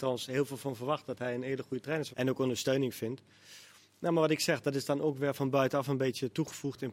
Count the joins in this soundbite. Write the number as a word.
one